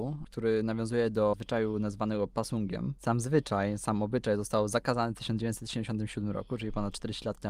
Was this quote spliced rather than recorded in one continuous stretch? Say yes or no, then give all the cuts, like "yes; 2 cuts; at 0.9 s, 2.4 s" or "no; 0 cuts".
no; 0 cuts